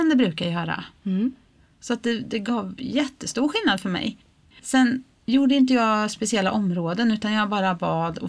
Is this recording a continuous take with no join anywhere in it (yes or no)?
yes